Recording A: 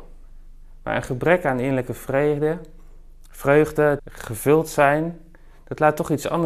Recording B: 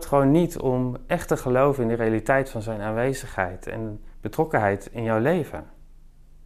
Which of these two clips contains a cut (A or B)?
A